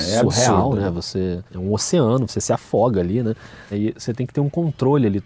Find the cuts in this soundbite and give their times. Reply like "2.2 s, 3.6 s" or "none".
1.5 s, 3.7 s